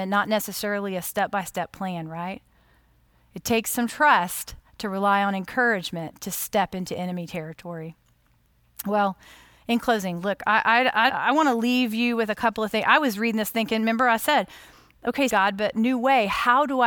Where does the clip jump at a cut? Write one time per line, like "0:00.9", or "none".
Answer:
0:11.1
0:15.3

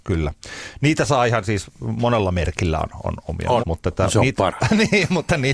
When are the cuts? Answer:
0:03.6

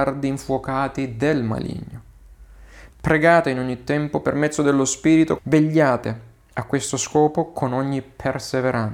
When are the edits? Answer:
0:02.9
0:05.4

